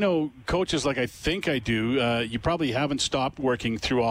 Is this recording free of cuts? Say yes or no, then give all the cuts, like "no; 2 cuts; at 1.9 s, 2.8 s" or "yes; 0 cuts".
yes; 0 cuts